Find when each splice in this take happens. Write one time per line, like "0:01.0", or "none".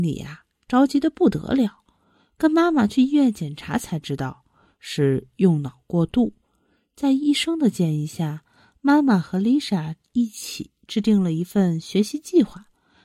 none